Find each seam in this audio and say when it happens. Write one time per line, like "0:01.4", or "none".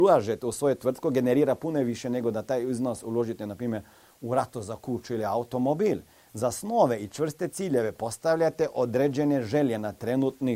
none